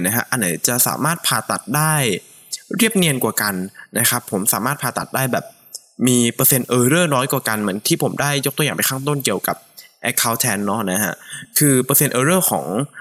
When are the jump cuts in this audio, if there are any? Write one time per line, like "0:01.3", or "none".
none